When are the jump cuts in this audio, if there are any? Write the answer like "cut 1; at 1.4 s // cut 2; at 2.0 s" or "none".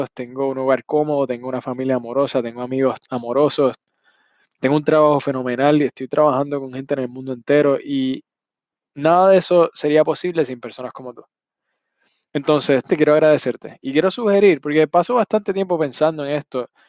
cut 1; at 12.9 s